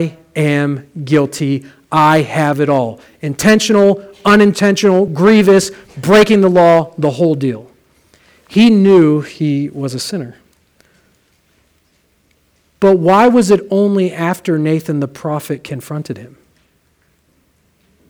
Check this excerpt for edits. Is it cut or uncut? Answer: uncut